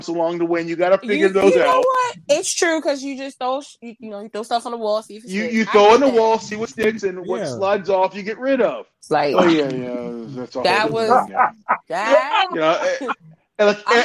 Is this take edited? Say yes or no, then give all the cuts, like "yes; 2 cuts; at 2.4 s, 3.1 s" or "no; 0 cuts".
yes; 1 cut; at 9.0 s